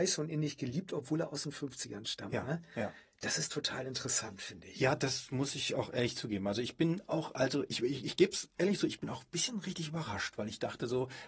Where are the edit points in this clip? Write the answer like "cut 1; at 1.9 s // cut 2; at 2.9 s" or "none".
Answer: none